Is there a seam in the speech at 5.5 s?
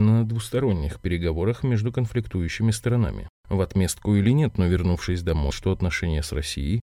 yes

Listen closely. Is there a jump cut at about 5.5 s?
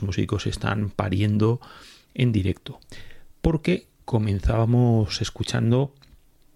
no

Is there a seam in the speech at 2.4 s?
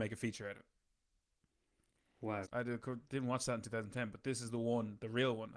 yes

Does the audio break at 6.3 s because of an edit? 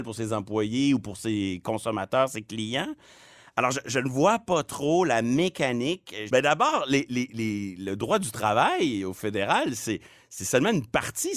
yes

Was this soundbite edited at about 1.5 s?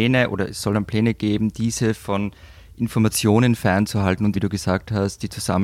no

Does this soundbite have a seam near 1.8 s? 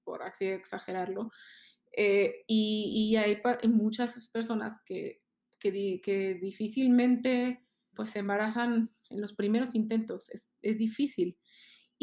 no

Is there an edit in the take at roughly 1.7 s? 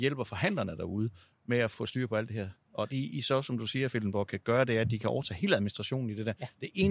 yes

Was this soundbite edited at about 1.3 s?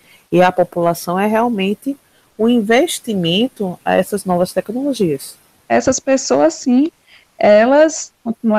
no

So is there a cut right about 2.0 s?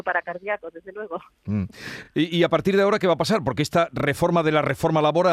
no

